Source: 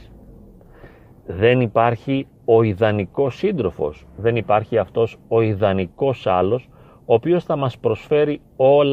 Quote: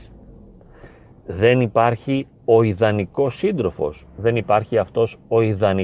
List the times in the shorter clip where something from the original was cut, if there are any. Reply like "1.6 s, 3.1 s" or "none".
none